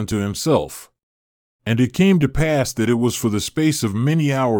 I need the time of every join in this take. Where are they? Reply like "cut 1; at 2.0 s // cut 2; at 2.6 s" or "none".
cut 1; at 1.6 s